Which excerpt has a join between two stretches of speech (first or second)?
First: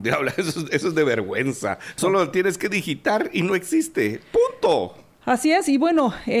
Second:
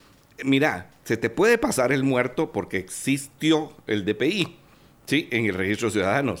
first